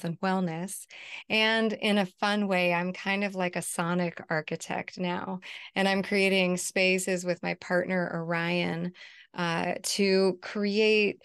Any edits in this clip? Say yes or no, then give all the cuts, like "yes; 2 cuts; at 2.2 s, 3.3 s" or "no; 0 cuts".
no; 0 cuts